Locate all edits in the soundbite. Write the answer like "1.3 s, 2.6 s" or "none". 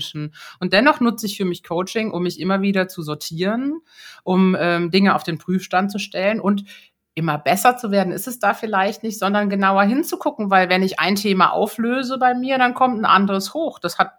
none